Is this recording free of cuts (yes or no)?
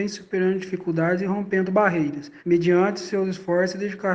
no